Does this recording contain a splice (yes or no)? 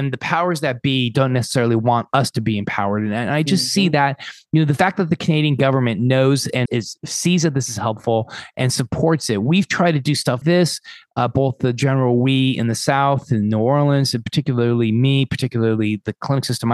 yes